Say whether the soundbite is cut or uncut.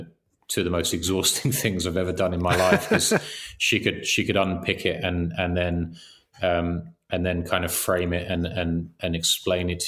uncut